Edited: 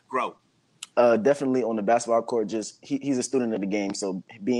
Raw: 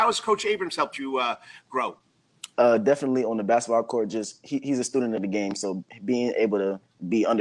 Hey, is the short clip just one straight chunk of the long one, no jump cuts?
yes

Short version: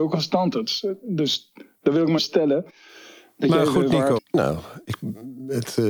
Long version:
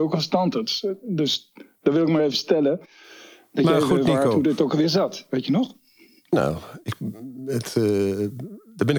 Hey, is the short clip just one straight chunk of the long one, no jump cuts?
no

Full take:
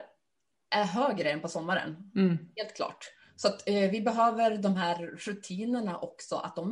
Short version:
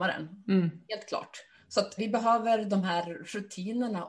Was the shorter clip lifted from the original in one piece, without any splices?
no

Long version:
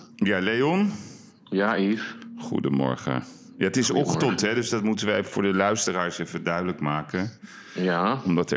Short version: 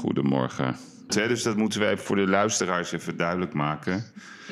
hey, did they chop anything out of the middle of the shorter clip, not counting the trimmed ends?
yes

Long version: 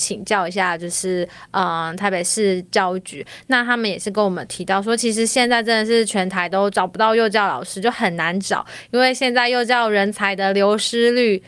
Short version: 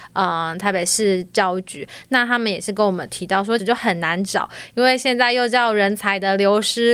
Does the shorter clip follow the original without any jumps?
no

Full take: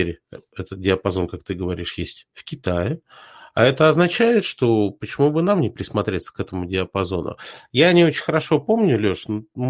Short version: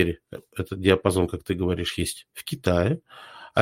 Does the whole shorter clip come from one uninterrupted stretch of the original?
yes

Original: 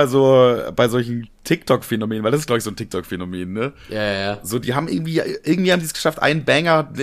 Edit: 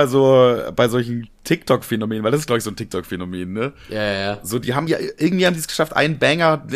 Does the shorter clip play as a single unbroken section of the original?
no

